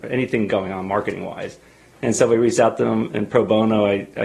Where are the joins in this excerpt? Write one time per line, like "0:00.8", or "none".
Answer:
none